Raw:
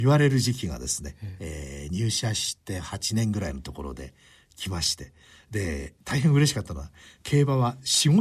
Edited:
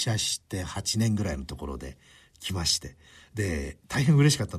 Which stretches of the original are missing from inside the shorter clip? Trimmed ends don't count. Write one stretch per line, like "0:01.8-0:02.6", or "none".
none